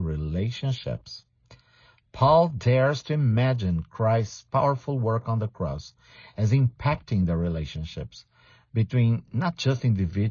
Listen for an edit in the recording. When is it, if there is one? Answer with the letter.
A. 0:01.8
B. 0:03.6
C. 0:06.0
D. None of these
D